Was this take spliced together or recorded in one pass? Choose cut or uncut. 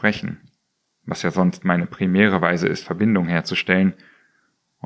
uncut